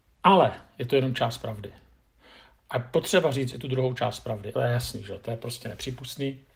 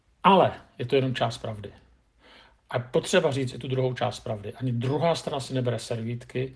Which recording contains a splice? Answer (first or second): first